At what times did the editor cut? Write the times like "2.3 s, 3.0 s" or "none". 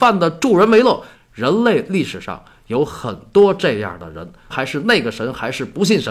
1.1 s, 4.5 s